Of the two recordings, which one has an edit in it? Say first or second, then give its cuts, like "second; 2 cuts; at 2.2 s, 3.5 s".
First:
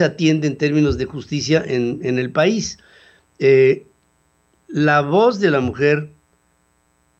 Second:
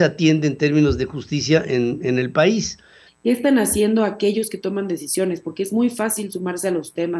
second; 1 cut; at 3.1 s